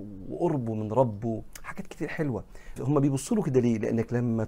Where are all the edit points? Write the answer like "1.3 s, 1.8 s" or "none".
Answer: 2.8 s